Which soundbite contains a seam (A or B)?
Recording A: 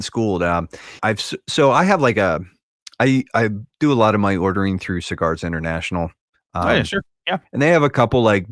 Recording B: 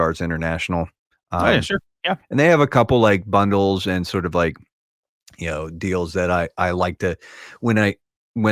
A